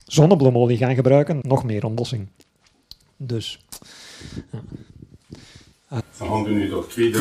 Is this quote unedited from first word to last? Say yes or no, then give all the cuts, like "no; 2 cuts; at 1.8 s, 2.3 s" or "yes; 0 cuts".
no; 2 cuts; at 1.4 s, 6.0 s